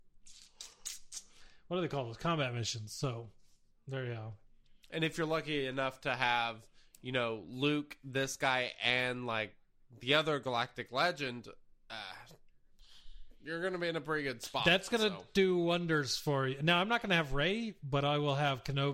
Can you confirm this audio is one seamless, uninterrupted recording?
yes; 0 cuts

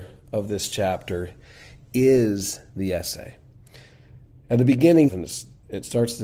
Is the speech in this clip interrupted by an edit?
yes; 1 cut; at 5.1 s

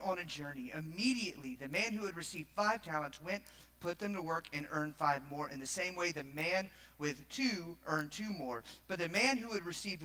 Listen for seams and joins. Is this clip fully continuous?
yes; 0 cuts

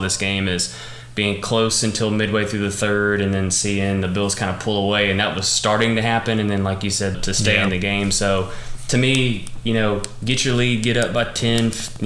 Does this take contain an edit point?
yes; 1 cut; at 7.1 s

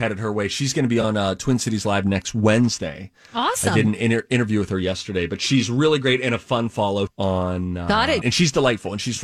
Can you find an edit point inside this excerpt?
yes; 2 cuts; at 7.1 s, 8.2 s

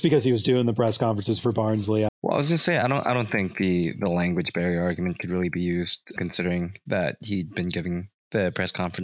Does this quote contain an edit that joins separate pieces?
yes; 2 cuts; at 2.1 s, 6.2 s

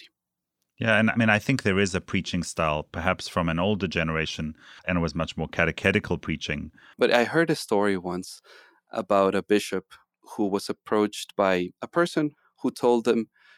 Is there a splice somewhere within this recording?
yes; 2 cuts; at 4.8 s, 6.9 s

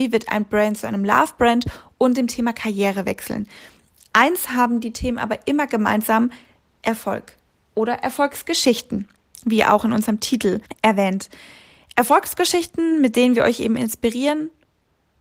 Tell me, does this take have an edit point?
no; 0 cuts

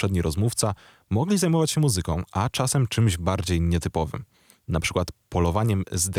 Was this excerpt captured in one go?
yes; 0 cuts

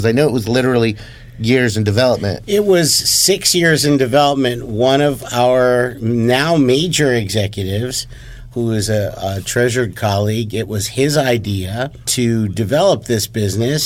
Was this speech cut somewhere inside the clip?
no; 0 cuts

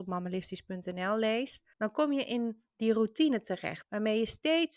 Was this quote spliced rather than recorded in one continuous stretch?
yes; 2 cuts; at 1.7 s, 3.8 s

